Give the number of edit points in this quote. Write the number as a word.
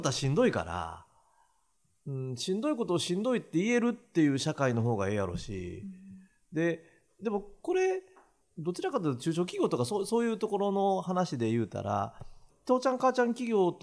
two